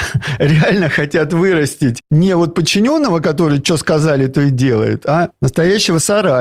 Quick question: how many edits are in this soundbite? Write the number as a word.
zero